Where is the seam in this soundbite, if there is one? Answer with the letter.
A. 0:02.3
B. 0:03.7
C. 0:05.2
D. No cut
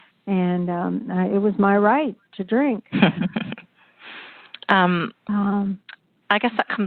A